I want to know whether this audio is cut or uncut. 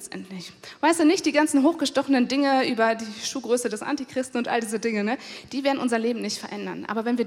uncut